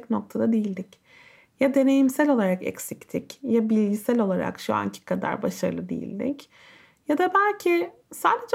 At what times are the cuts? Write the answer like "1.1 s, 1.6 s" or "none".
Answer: none